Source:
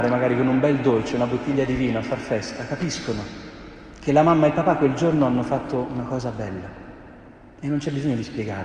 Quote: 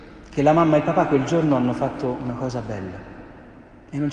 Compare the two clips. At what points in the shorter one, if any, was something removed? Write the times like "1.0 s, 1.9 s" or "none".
none